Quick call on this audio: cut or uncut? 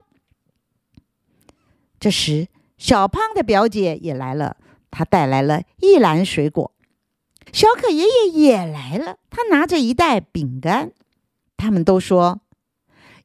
cut